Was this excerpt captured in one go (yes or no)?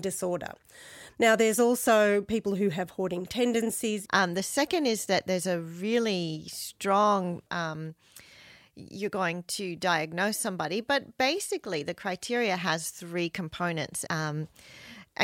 no